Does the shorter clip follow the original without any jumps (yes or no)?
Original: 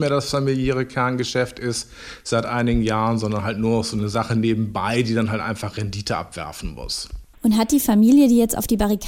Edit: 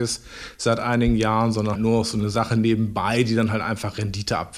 no